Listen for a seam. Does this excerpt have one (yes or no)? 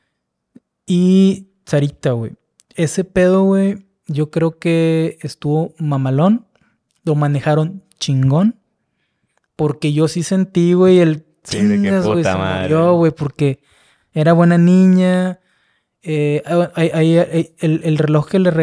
no